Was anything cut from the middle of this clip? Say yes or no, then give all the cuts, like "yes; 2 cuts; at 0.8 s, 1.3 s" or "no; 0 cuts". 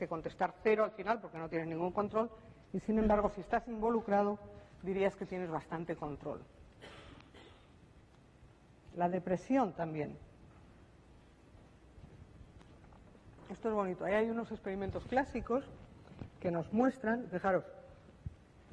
no; 0 cuts